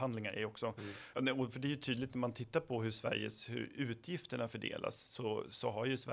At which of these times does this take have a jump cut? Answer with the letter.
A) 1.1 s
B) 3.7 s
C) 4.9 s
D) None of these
A